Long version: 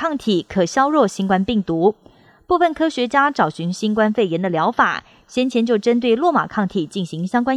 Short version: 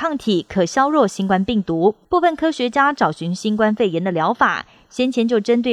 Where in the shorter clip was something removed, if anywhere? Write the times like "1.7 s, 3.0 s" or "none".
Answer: 2.0 s